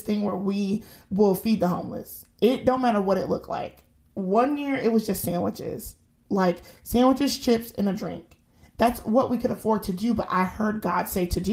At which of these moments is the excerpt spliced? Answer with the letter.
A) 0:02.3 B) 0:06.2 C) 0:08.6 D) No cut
D